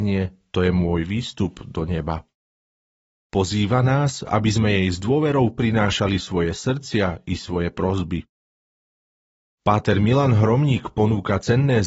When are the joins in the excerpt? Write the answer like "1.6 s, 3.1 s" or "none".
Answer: 3.2 s